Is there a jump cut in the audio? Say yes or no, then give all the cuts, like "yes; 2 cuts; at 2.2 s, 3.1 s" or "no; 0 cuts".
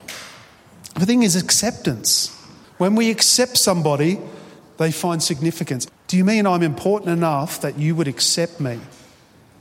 yes; 2 cuts; at 2.6 s, 5.9 s